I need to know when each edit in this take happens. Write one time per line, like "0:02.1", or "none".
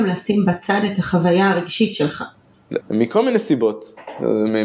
0:02.8